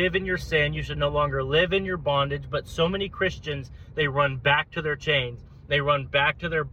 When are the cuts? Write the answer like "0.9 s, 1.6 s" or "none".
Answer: none